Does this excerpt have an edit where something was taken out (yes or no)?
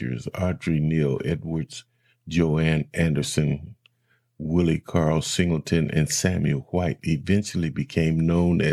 no